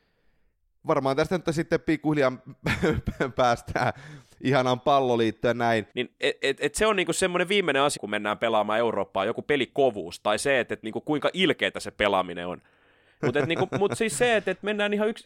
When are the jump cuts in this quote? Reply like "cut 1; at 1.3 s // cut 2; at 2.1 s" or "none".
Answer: cut 1; at 5.9 s // cut 2; at 8.0 s // cut 3; at 13.2 s

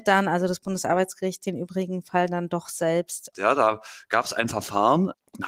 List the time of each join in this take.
cut 1; at 3.3 s

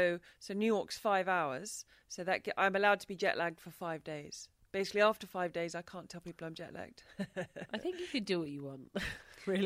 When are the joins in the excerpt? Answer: none

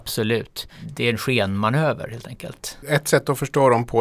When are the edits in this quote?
cut 1; at 2.8 s

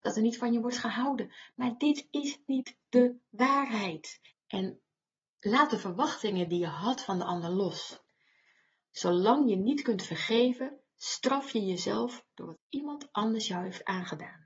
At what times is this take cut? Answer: cut 1; at 4.3 s

